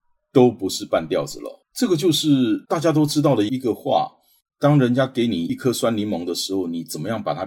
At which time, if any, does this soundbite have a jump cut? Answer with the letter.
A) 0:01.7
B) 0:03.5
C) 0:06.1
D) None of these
B